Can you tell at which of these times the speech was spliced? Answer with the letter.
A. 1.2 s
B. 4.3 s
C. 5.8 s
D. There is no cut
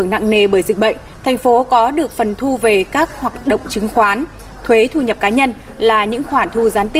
A